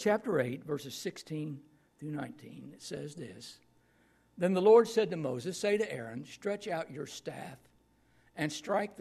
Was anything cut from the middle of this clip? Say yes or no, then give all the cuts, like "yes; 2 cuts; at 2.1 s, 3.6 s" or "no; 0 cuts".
no; 0 cuts